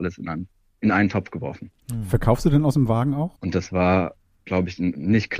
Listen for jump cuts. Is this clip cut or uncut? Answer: cut